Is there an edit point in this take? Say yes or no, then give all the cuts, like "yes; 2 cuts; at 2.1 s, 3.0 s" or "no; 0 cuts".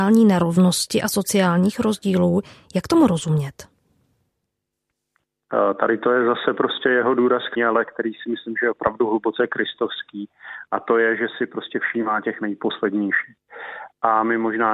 yes; 1 cut; at 7.6 s